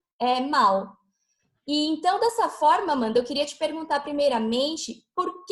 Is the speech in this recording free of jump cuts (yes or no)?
yes